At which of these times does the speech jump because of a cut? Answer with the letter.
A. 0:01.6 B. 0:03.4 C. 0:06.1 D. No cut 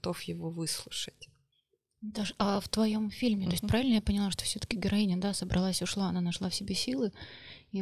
D